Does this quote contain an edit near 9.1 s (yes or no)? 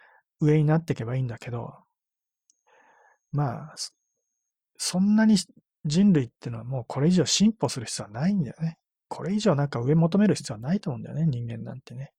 yes